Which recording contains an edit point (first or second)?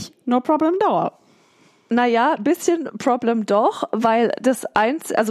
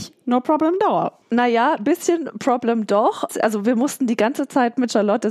second